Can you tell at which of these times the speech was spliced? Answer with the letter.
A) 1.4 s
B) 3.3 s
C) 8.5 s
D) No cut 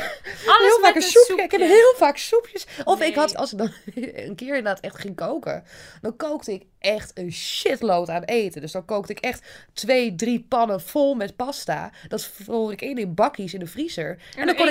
B